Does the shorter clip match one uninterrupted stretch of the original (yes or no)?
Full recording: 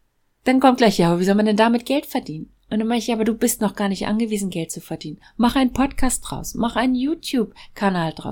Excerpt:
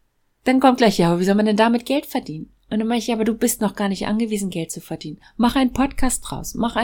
yes